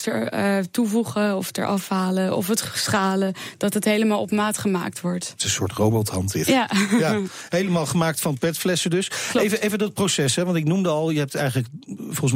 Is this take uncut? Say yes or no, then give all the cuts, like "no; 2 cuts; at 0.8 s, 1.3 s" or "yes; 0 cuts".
yes; 0 cuts